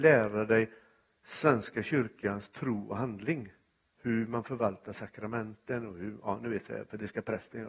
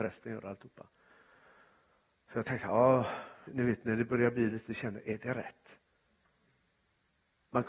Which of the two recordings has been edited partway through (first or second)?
second